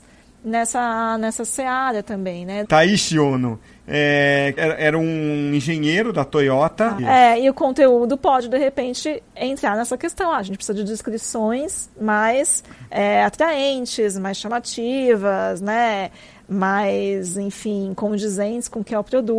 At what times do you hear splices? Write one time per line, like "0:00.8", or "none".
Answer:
0:02.6
0:04.6
0:07.0